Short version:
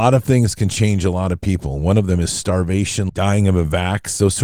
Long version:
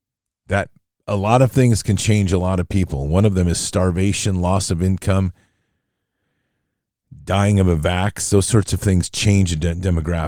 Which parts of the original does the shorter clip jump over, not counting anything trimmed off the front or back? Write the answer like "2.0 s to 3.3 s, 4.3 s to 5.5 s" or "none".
4.4 s to 7.2 s